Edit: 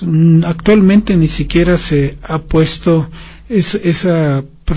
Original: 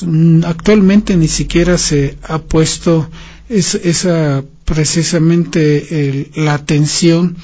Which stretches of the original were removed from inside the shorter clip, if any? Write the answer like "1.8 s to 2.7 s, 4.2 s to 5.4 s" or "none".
none